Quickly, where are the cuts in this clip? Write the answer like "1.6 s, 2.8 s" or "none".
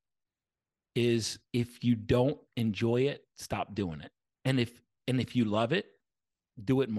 1.5 s, 4.3 s

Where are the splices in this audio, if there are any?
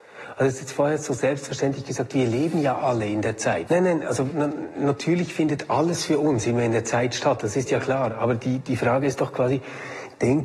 3.7 s

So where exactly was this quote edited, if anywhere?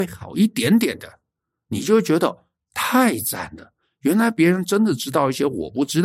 none

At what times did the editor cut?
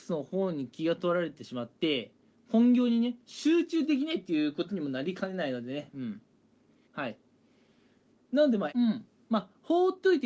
6.9 s, 8.7 s

